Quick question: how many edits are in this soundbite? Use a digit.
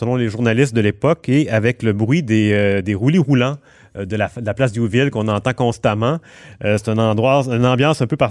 0